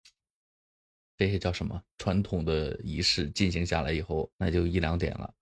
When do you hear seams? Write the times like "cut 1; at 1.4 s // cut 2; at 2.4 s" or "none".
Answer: cut 1; at 4.3 s